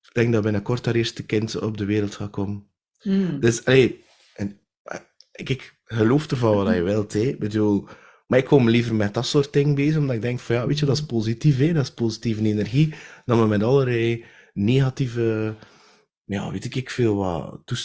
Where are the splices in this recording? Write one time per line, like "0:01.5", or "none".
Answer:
none